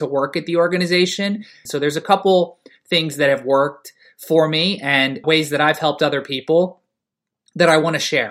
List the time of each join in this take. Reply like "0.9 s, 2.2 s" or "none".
1.7 s, 5.2 s